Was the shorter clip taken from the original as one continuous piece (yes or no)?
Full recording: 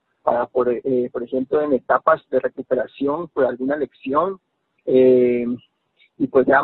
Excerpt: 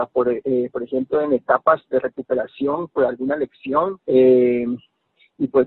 no